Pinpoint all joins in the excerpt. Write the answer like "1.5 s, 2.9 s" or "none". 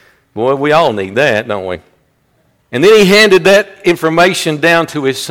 2.6 s